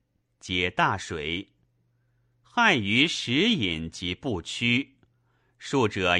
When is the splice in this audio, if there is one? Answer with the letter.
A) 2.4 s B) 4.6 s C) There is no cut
A